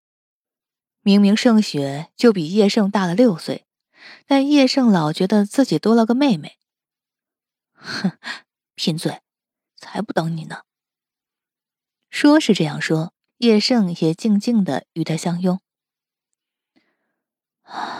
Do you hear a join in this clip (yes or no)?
yes